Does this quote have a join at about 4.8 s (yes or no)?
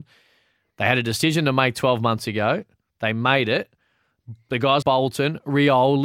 yes